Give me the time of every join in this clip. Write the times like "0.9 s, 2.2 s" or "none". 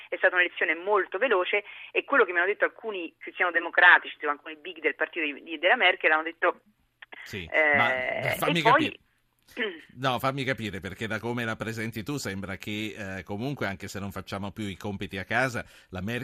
7.2 s